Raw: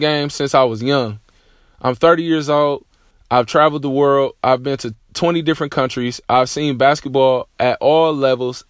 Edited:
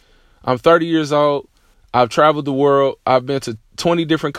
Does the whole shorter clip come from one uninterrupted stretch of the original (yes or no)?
yes